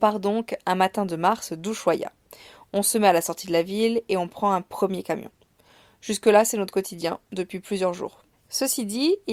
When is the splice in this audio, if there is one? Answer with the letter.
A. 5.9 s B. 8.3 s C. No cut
B